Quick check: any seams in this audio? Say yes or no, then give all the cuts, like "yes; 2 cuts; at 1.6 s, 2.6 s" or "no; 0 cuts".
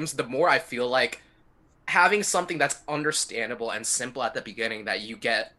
no; 0 cuts